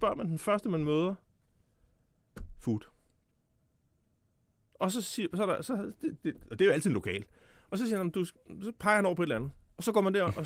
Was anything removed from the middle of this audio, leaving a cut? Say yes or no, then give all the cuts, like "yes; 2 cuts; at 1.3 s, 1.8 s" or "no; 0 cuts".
no; 0 cuts